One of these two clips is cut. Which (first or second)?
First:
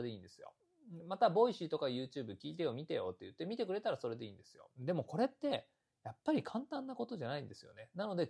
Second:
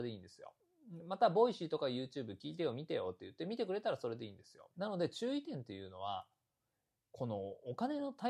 second